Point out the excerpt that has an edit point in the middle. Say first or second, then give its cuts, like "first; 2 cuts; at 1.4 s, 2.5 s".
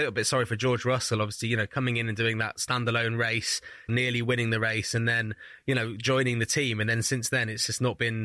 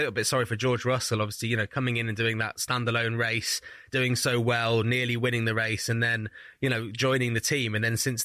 first; 1 cut; at 3.9 s